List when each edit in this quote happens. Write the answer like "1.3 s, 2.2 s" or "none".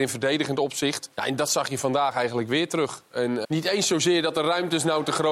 1.1 s, 3.4 s